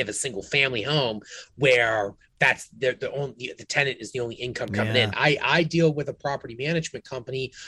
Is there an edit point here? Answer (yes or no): yes